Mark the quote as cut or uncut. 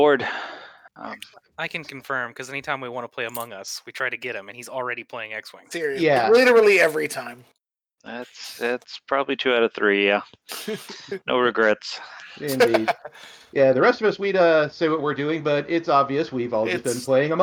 uncut